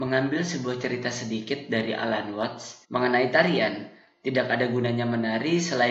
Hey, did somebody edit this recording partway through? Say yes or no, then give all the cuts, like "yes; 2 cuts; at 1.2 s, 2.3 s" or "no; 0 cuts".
yes; 1 cut; at 2.8 s